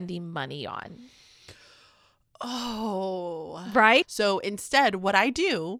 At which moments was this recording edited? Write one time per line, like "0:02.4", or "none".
0:04.0